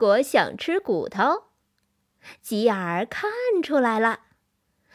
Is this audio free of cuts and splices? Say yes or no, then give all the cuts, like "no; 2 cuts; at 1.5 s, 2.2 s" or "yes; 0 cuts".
yes; 0 cuts